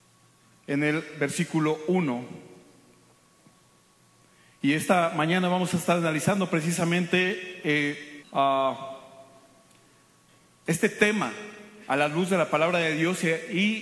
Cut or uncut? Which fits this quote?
cut